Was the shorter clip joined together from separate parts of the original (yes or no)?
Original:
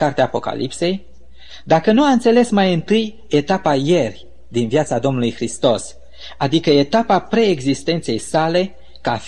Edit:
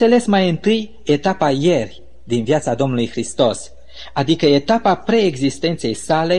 no